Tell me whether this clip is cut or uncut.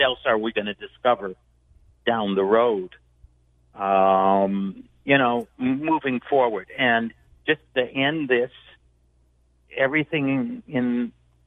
uncut